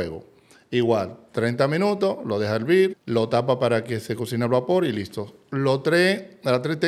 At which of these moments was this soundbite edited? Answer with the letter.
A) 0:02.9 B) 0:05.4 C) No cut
A